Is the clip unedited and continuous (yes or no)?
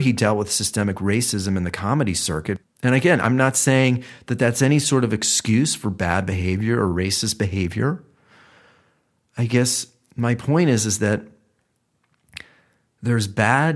no